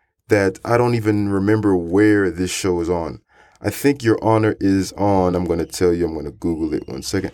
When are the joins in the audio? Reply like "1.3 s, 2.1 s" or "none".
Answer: none